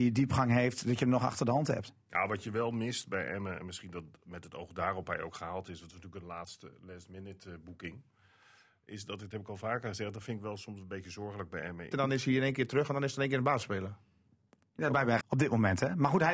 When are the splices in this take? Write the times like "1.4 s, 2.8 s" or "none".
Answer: 11.9 s, 15.2 s